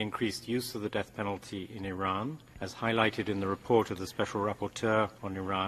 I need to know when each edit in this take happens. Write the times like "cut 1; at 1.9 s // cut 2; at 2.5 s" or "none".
none